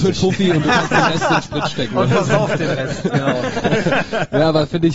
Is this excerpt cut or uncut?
uncut